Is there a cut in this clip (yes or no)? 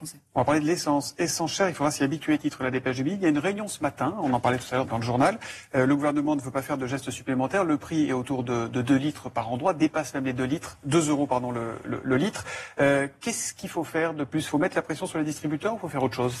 yes